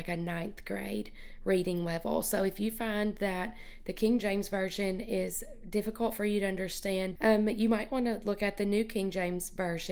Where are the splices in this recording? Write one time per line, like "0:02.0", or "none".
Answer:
0:07.2